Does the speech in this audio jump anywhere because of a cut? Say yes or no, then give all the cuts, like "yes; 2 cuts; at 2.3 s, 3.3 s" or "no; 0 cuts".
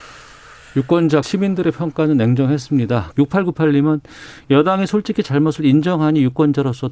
yes; 2 cuts; at 1.2 s, 3.1 s